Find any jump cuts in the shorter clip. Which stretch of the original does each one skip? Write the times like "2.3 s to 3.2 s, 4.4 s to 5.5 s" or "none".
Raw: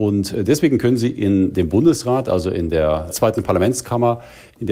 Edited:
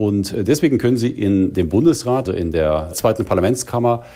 2.3 s to 2.4 s